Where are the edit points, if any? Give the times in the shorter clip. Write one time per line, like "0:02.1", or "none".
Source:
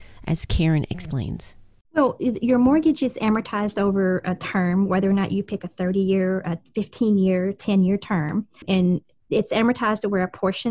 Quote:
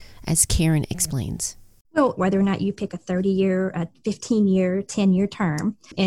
0:02.2